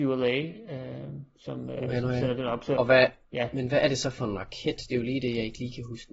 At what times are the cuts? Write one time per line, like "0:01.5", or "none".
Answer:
none